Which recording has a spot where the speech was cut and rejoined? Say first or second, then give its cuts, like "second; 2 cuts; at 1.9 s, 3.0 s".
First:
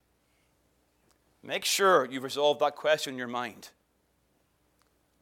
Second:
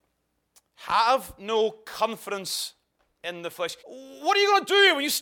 second; 1 cut; at 3.8 s